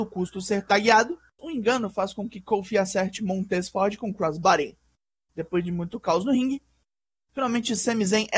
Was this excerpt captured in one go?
no; 1 cut; at 1.4 s

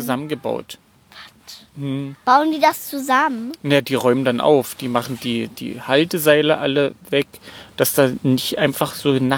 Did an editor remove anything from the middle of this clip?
no; 0 cuts

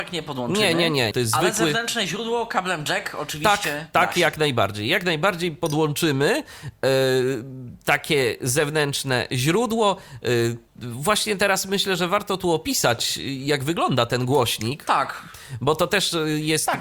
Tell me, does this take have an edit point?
yes; 2 cuts; at 1.1 s, 10.7 s

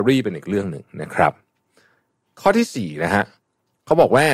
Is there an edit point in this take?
no; 0 cuts

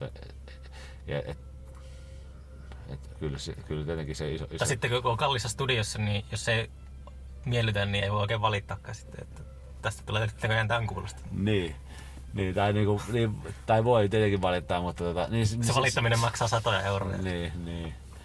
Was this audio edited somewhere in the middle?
no; 0 cuts

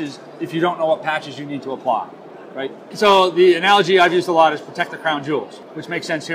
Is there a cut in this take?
yes; 1 cut; at 2.9 s

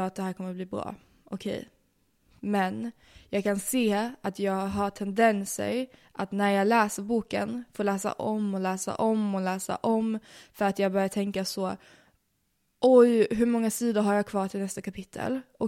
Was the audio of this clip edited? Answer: no; 0 cuts

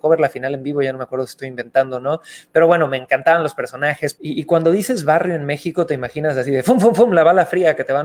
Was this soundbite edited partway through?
yes; 1 cut; at 4.1 s

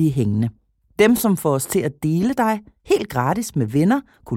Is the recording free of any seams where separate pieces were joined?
yes; 0 cuts

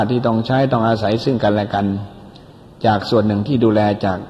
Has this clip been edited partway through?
no; 0 cuts

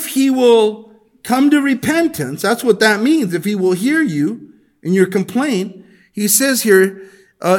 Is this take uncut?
yes; 0 cuts

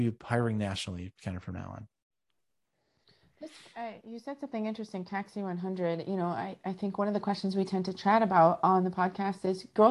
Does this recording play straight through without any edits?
yes; 0 cuts

